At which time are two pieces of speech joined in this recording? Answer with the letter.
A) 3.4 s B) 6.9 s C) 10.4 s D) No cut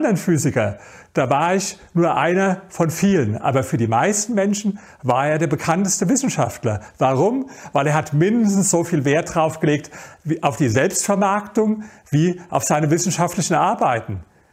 D